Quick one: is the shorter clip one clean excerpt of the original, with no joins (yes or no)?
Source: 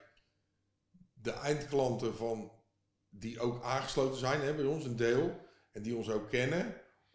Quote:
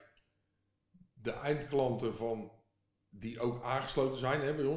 yes